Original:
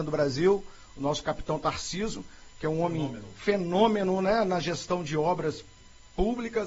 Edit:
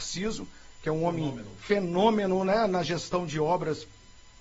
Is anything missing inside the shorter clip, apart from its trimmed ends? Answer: no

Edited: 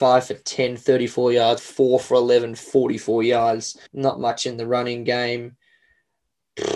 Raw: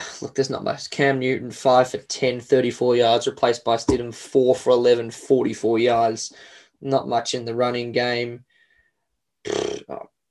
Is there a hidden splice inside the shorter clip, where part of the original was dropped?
yes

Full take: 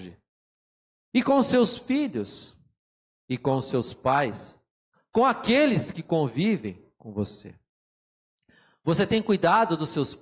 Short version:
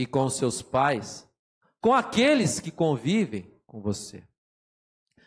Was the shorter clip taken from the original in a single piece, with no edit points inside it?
yes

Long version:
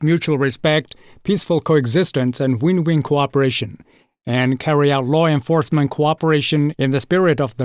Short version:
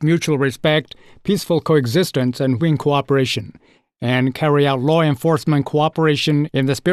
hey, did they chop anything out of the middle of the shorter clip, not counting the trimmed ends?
yes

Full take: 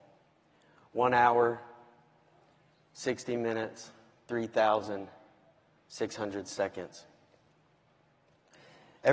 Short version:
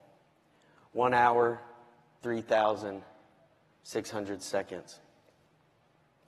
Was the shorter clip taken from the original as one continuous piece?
no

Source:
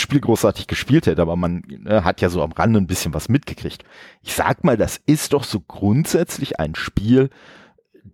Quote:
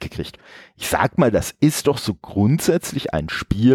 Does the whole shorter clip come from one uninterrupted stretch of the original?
yes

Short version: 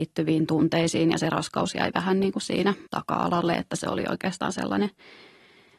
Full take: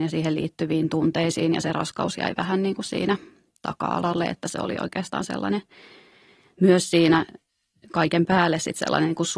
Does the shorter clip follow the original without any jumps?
no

